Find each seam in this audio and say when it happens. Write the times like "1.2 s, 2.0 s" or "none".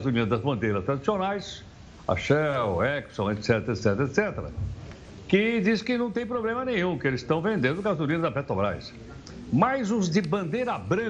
none